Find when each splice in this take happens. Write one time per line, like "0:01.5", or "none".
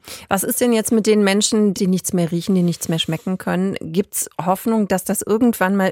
0:01.7